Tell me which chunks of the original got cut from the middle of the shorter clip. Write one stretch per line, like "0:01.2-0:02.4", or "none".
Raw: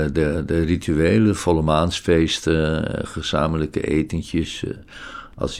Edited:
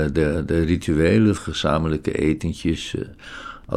0:01.4-0:03.1